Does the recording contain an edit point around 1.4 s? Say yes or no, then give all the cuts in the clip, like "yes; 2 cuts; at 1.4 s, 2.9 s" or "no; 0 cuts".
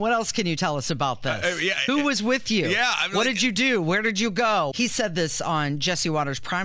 no; 1 cut; at 4.7 s